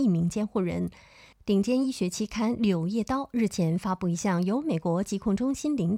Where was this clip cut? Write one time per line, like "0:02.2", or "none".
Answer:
0:01.3